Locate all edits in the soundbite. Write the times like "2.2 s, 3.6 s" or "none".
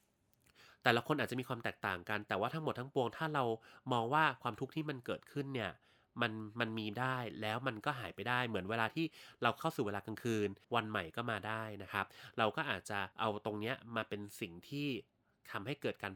10.6 s, 13.1 s